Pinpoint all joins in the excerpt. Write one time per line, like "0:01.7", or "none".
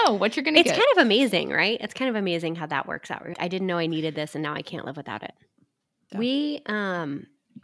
0:03.3
0:06.1